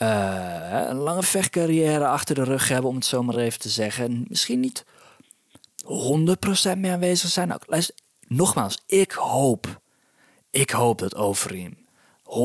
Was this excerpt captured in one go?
yes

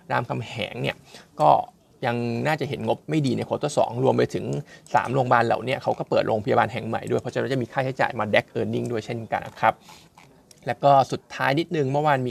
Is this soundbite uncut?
no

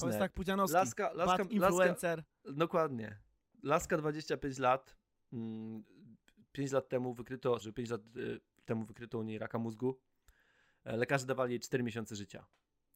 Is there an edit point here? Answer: yes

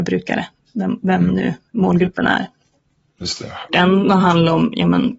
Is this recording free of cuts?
no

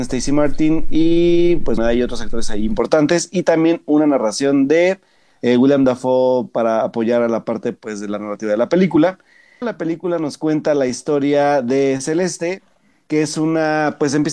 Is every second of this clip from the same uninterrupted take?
no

